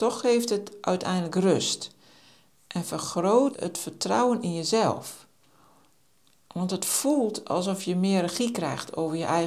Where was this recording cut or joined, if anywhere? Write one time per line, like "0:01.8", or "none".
0:03.5